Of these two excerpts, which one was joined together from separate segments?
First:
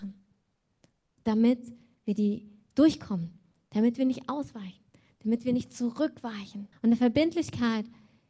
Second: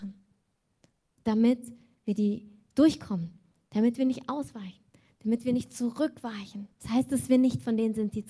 first; 1 cut; at 6.7 s

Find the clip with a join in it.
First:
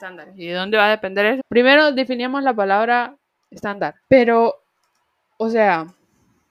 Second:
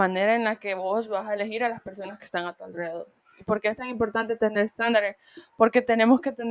first; 2 cuts; at 1.4 s, 4.0 s

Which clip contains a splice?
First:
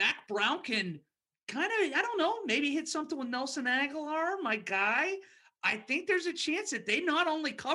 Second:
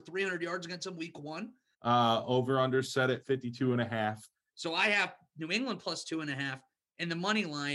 second; 2 cuts; at 1.7 s, 4.5 s

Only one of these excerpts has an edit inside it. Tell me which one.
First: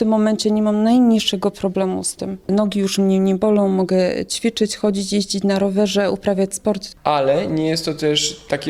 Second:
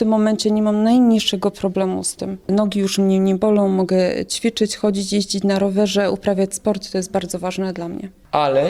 first; 1 cut; at 6.9 s

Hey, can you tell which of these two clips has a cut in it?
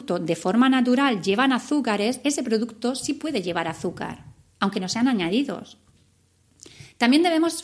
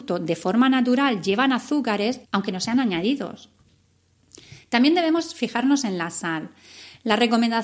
second; 1 cut; at 2.2 s

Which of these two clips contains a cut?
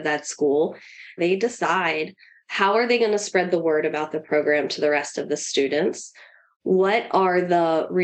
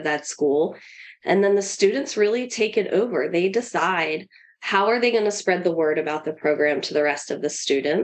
first; 1 cut; at 1.2 s

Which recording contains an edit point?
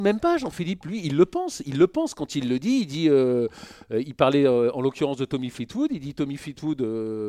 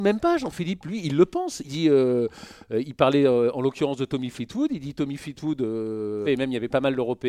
second; 2 cuts; at 1.6 s, 6.3 s

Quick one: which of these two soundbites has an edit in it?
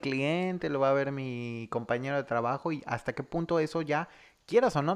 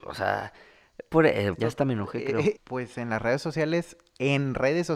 second; 2 cuts; at 1.5 s, 2.5 s

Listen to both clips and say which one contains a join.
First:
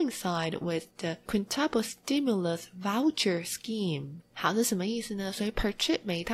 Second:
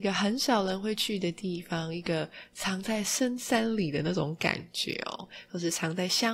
first; 1 cut; at 4.3 s

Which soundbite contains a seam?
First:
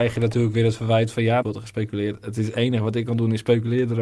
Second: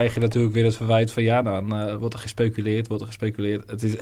first; 1 cut; at 1.4 s

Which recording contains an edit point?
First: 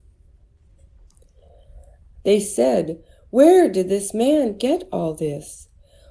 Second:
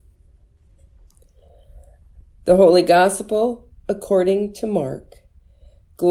first; 1 cut; at 2.2 s

